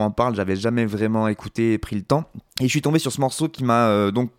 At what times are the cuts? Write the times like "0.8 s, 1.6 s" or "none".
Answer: 2.5 s